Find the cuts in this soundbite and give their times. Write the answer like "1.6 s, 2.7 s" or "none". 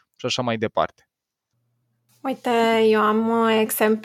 none